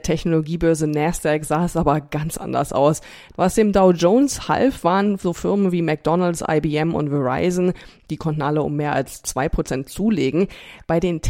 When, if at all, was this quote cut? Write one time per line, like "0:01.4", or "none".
0:03.3